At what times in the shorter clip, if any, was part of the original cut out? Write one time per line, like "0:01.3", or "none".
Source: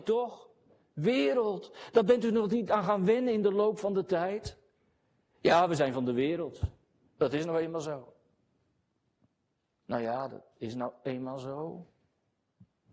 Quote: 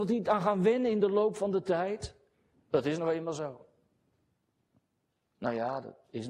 0:02.5